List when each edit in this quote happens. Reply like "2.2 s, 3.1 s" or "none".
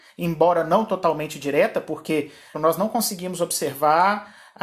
2.5 s